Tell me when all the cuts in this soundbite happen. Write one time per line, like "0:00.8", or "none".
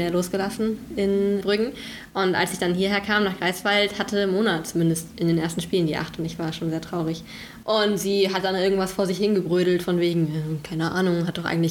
0:01.4
0:07.6